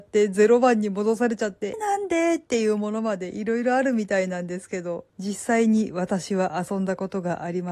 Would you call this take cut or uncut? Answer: cut